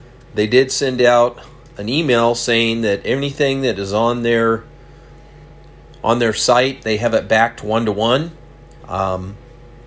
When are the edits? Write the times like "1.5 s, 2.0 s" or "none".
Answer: 8.8 s